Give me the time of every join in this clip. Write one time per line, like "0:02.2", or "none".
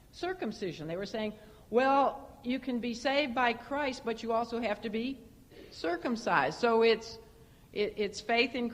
none